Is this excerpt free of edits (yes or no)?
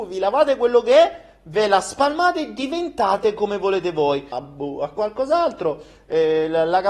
no